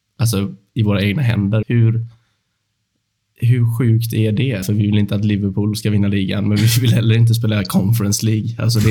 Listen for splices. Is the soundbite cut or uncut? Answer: cut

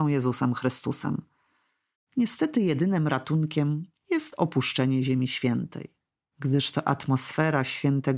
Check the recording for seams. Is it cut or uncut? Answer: cut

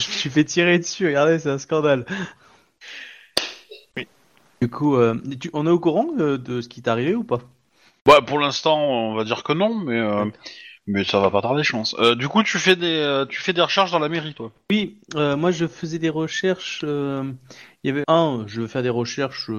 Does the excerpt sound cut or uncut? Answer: cut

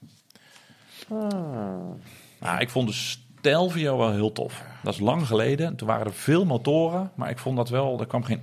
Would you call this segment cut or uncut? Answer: cut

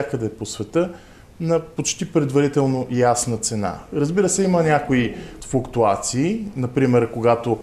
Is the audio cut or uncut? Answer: uncut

